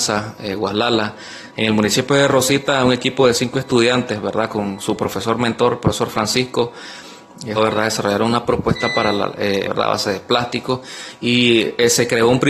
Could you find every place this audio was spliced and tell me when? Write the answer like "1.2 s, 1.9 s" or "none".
1.5 s, 7.6 s, 9.6 s